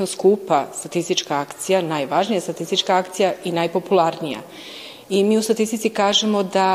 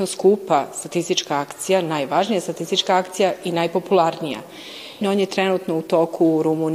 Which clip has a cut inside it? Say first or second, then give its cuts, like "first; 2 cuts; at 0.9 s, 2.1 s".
second; 1 cut; at 5.0 s